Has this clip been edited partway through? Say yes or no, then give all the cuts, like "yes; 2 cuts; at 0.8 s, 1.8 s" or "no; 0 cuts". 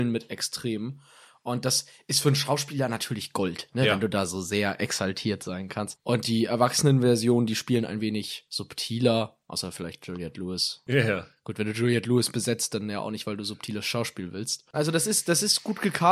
yes; 1 cut; at 14.7 s